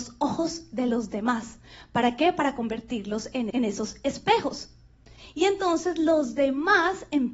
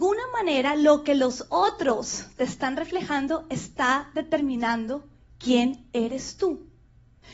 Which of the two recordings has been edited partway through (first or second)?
first